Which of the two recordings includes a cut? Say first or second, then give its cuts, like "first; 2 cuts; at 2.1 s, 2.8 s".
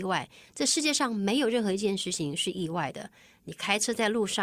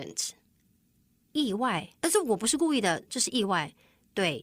second; 2 cuts; at 2.0 s, 3.1 s